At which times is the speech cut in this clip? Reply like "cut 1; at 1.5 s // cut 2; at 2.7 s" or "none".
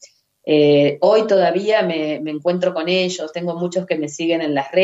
none